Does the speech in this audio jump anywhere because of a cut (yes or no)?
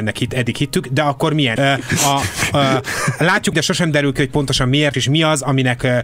yes